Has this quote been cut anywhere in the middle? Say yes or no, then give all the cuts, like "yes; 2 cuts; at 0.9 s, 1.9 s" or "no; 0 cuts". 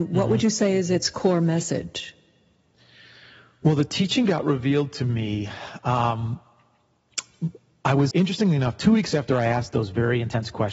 yes; 1 cut; at 8.1 s